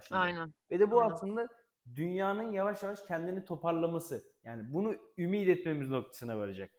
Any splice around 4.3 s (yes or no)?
no